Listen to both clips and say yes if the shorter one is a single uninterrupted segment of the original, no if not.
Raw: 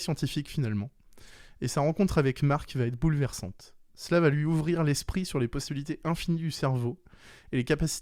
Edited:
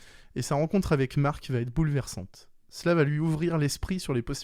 yes